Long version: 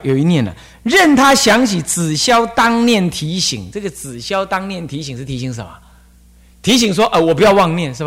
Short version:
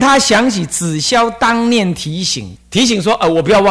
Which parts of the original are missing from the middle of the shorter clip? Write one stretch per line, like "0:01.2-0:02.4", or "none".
0:03.7-0:06.5